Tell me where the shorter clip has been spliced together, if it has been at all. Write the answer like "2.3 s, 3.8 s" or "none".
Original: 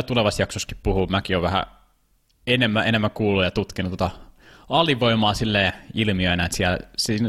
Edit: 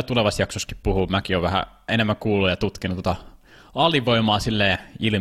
1.9 s